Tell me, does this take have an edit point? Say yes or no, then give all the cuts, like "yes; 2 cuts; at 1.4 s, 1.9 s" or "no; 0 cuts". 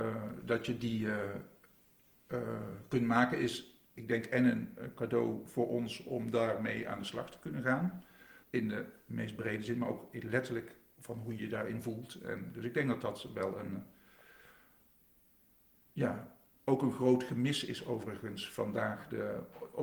yes; 2 cuts; at 8.4 s, 11.4 s